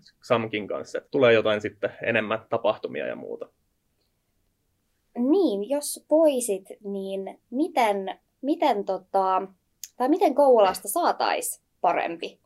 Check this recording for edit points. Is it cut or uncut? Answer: cut